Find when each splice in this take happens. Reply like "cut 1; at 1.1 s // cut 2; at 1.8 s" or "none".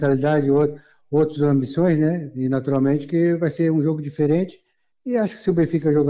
none